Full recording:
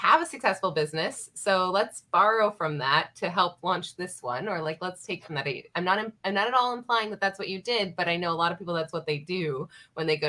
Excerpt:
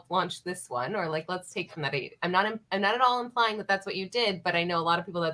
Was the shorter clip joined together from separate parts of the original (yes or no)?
no